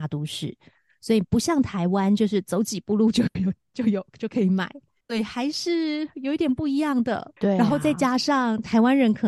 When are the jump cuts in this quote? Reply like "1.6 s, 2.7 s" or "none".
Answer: 5.0 s, 7.4 s